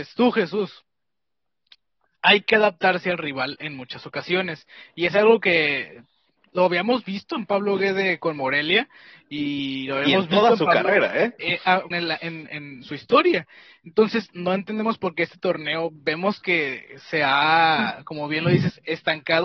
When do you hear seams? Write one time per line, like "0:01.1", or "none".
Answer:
0:11.9